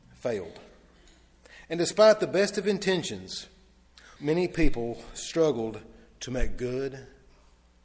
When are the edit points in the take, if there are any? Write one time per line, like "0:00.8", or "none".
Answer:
0:04.2